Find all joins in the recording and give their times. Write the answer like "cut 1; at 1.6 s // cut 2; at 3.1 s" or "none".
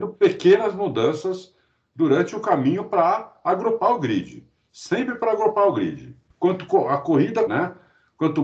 cut 1; at 6.3 s // cut 2; at 7.5 s